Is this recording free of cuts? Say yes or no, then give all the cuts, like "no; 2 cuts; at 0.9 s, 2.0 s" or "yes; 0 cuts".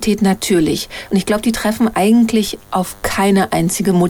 no; 1 cut; at 1.1 s